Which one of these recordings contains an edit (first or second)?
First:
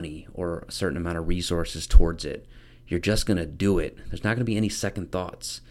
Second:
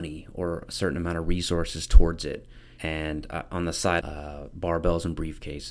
second